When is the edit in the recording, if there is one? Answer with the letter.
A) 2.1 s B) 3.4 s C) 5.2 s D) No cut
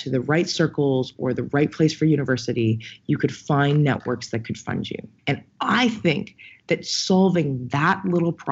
C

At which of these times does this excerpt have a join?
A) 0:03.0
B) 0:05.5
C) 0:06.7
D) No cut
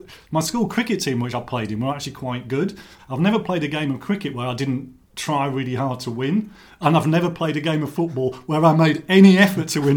A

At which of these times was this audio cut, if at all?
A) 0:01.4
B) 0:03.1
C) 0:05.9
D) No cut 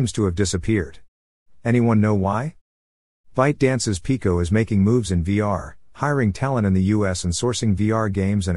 D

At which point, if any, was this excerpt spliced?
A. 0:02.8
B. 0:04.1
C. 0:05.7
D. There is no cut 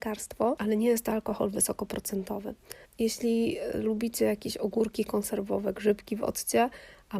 A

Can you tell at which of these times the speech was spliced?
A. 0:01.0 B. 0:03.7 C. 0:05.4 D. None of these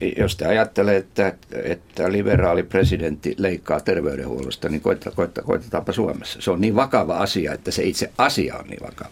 C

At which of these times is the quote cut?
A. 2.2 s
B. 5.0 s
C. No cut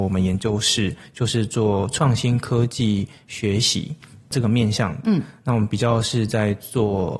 C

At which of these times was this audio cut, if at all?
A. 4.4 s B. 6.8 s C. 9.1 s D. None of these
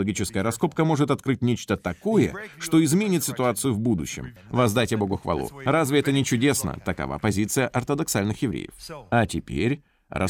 A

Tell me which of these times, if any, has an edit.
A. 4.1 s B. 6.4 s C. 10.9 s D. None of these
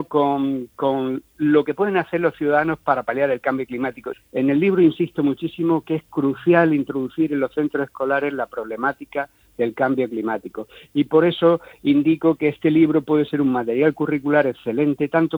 A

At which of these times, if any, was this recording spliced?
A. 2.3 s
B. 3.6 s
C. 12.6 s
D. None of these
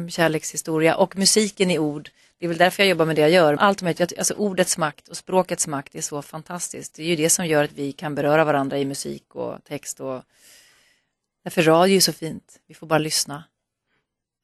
B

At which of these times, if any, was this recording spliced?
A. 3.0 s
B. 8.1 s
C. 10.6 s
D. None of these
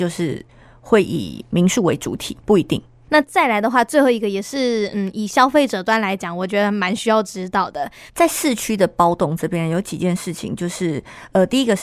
B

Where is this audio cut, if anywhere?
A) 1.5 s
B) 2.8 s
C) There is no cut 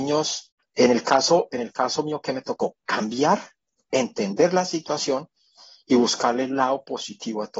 C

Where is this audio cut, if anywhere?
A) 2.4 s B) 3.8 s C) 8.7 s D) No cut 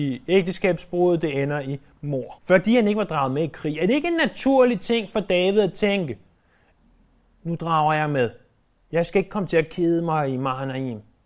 A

